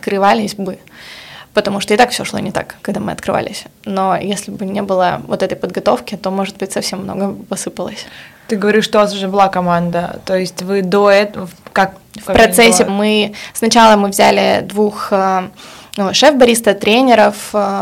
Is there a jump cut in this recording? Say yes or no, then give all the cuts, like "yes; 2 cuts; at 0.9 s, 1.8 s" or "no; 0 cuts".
yes; 1 cut; at 12.9 s